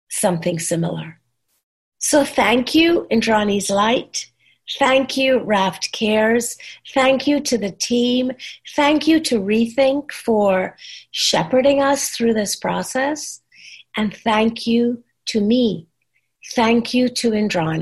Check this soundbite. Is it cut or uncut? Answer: uncut